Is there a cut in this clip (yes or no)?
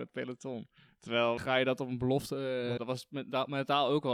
yes